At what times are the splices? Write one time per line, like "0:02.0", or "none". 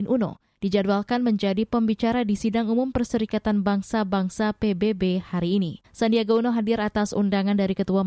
0:05.8